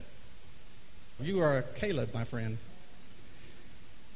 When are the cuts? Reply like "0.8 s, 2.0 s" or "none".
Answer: 1.2 s

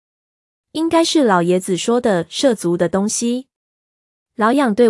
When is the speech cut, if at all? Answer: none

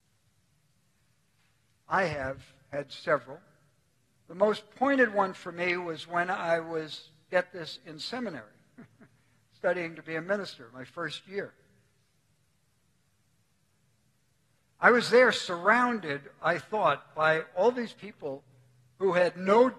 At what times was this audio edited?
none

